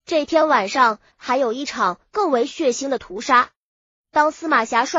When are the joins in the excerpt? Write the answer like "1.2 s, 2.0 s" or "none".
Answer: 1.1 s